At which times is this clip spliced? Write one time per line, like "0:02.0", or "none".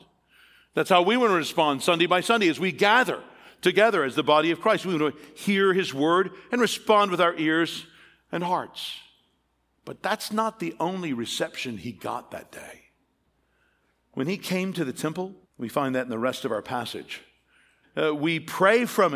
0:09.8
0:15.5
0:17.8